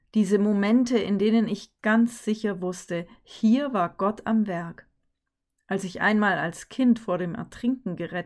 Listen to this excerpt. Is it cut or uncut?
cut